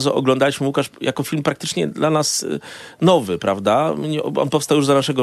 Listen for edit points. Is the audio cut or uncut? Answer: uncut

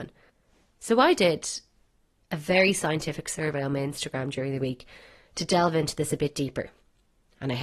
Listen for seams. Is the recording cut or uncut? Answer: uncut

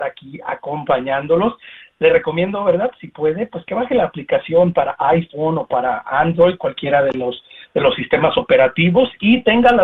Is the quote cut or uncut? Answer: uncut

